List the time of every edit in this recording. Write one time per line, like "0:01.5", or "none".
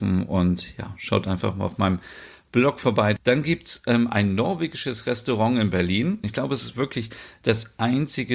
0:03.2
0:06.2